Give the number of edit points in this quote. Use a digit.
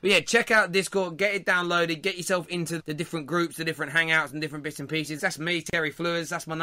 2